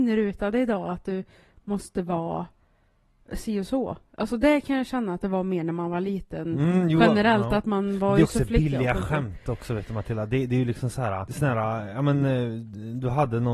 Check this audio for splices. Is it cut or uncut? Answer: uncut